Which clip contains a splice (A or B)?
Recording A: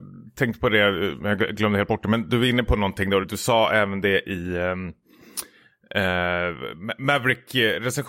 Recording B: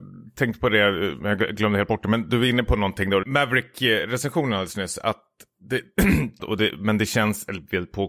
B